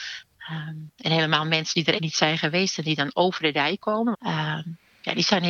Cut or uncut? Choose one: cut